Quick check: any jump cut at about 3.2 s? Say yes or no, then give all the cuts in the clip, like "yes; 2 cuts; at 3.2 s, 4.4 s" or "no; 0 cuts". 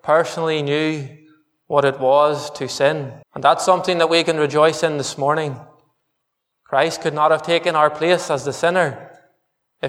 yes; 2 cuts; at 3.2 s, 6.5 s